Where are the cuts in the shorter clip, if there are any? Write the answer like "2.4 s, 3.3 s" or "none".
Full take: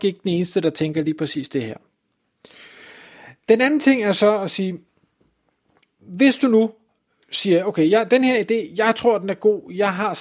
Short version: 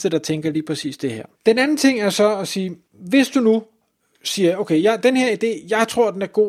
1.3 s, 2.8 s